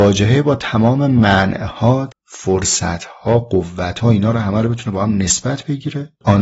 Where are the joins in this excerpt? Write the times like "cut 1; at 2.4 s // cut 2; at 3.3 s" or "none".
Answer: cut 1; at 2.1 s